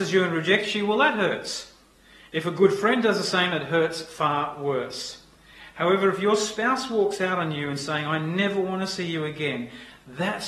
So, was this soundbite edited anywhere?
no; 0 cuts

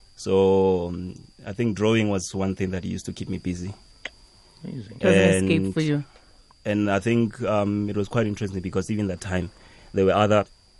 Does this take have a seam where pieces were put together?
no; 0 cuts

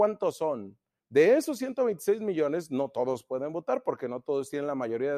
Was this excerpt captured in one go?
no; 1 cut; at 1.0 s

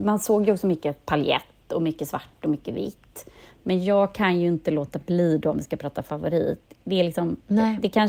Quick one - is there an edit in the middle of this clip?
no; 0 cuts

